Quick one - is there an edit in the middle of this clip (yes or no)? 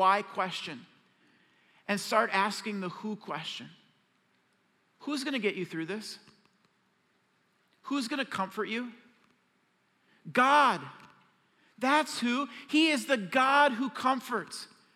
no